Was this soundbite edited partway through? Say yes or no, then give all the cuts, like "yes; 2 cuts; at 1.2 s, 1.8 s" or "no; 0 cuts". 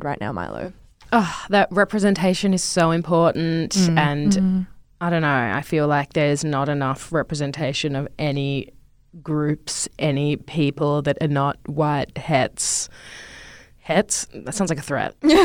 yes; 1 cut; at 12.1 s